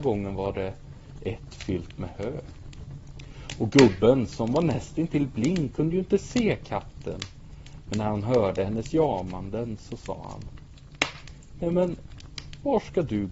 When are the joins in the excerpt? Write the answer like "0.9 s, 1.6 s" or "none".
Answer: none